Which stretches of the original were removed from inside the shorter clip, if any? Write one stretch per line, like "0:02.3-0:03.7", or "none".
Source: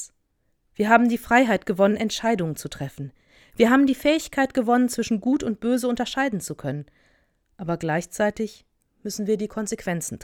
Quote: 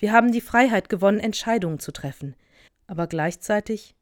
0:03.4-0:07.4